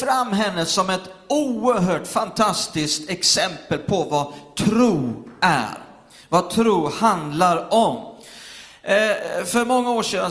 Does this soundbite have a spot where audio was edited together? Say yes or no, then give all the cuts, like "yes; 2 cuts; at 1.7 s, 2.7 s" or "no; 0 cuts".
no; 0 cuts